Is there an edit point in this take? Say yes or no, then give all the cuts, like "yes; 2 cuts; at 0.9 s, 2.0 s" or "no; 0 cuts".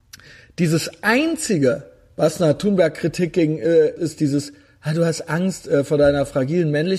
yes; 1 cut; at 4.0 s